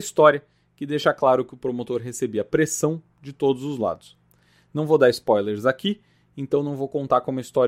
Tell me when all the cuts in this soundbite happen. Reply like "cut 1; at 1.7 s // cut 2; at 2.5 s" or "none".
none